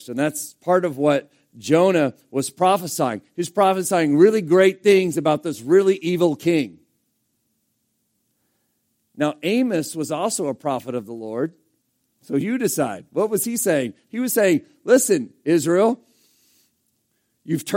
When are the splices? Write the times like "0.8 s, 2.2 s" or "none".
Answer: 12.1 s